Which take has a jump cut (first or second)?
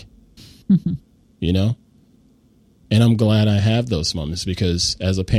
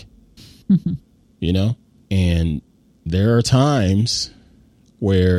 second